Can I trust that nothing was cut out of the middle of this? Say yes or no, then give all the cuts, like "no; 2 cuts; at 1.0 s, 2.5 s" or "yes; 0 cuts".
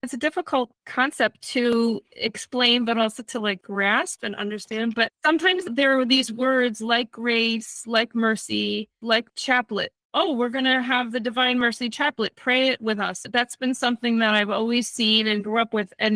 yes; 0 cuts